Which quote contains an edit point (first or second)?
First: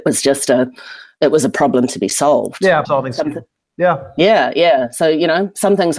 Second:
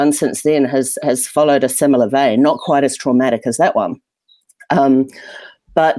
first